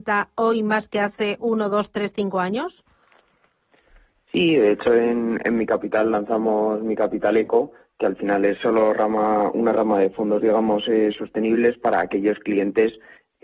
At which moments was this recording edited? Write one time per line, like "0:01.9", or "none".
none